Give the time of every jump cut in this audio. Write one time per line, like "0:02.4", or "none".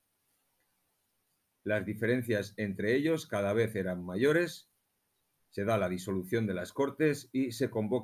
0:01.5